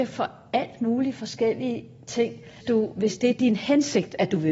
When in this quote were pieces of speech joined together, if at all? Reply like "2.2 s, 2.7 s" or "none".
2.6 s